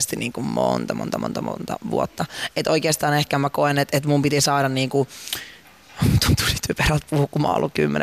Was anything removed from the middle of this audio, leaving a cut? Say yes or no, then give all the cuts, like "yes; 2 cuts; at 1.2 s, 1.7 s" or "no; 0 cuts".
no; 0 cuts